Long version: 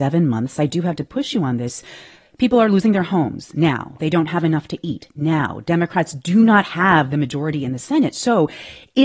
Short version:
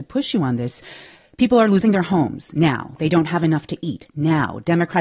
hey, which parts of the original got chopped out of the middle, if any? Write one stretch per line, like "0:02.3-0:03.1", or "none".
none